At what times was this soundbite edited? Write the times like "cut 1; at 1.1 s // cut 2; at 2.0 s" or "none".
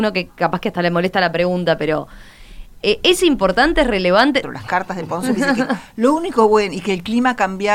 cut 1; at 4.4 s

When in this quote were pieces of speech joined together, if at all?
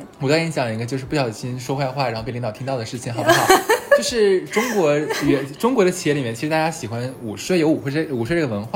none

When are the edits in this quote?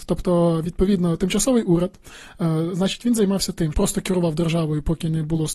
cut 1; at 3.7 s

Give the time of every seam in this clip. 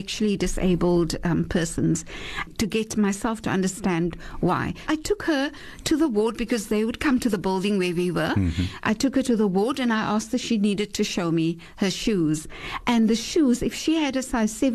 cut 1; at 2.5 s // cut 2; at 4.9 s

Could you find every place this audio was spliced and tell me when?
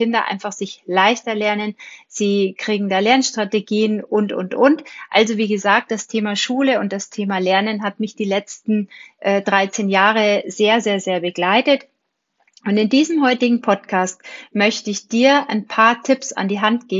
none

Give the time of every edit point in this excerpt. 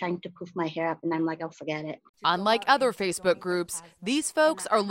cut 1; at 2.1 s

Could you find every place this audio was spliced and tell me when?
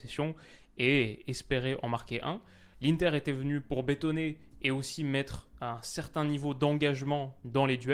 cut 1; at 2.7 s

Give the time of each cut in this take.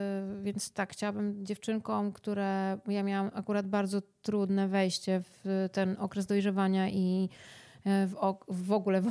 none

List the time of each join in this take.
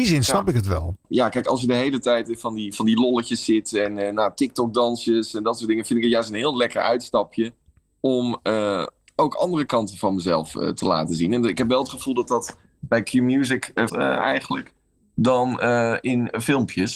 cut 1; at 13.9 s

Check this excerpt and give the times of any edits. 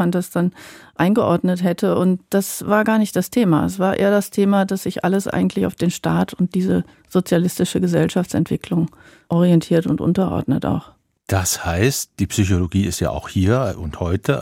none

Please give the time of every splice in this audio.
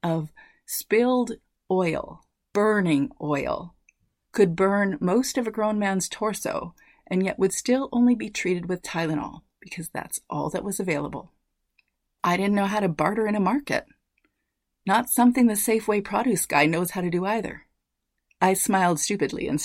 cut 1; at 18.4 s

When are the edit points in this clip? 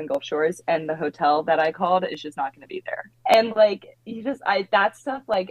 cut 1; at 3.1 s

